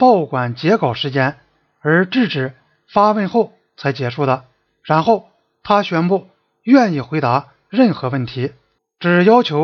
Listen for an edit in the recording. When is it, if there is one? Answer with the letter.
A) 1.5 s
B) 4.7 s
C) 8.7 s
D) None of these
B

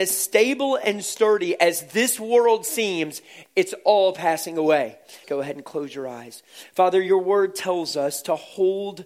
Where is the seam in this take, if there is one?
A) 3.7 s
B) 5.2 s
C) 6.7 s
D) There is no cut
B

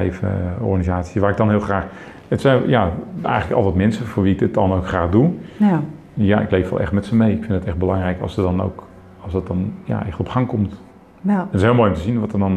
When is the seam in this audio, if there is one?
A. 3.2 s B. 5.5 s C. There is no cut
A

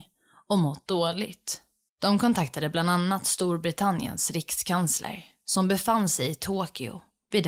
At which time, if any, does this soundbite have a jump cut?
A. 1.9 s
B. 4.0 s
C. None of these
A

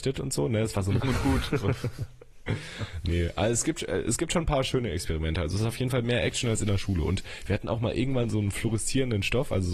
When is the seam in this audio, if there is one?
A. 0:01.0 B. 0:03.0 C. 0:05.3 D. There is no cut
A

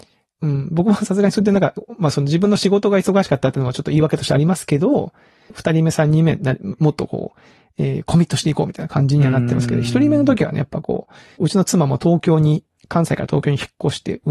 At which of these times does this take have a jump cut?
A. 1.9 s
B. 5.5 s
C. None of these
B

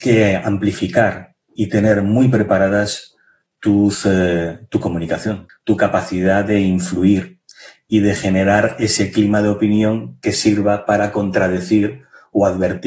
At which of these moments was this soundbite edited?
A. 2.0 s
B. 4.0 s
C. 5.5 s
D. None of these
C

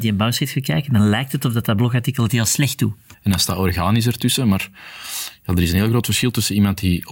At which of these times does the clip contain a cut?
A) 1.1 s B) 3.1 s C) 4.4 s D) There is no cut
B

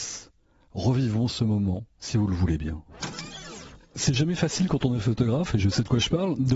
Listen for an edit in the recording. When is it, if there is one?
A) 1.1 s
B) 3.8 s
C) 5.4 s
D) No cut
D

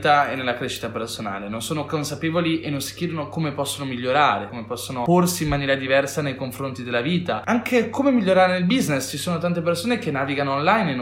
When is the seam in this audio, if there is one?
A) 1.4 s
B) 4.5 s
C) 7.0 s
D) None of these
B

